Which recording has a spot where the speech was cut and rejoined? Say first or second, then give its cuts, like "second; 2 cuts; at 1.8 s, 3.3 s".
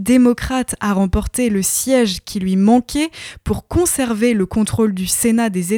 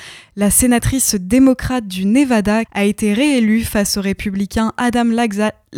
second; 1 cut; at 2.7 s